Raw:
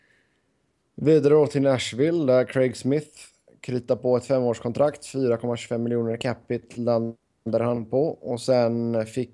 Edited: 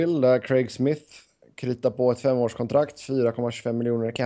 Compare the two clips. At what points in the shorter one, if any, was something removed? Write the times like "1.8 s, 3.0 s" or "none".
none